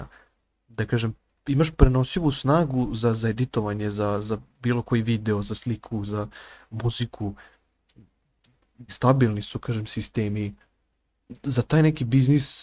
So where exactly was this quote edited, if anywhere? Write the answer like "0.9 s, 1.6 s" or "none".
6.1 s, 8.9 s